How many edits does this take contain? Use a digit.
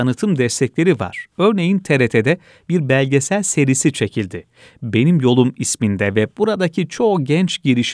0